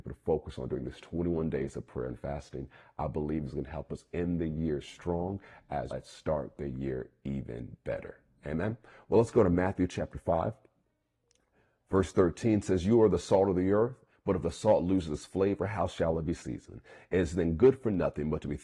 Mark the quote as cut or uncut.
cut